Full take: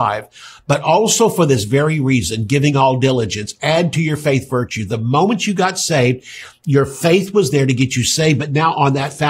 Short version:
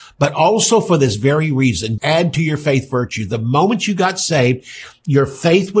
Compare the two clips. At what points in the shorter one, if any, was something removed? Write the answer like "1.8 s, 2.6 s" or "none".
2.0 s